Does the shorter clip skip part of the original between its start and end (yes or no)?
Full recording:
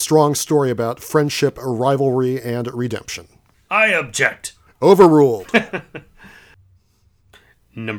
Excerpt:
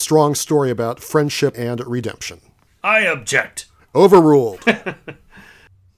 yes